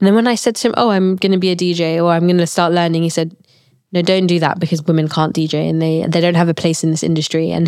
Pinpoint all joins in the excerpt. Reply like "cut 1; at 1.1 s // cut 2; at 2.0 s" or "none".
none